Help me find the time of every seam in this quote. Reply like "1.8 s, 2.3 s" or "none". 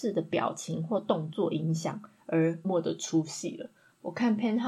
2.6 s